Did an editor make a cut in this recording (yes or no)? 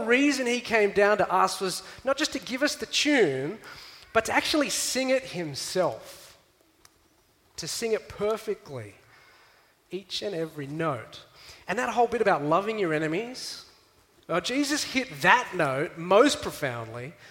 no